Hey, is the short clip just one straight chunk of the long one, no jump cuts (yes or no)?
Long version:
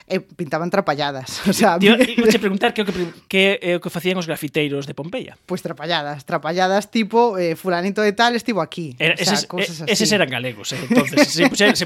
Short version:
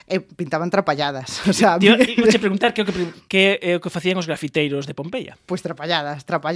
yes